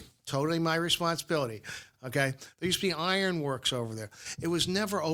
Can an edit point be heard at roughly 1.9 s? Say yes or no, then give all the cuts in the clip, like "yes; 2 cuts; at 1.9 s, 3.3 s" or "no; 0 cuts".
yes; 1 cut; at 1.9 s